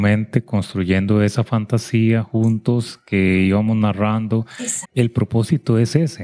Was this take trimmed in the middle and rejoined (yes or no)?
yes